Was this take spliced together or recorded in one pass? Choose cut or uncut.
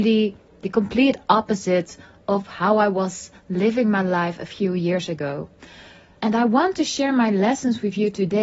cut